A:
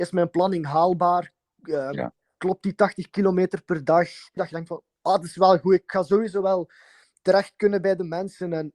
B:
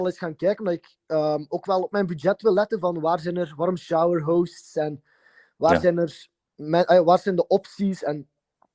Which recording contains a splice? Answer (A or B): A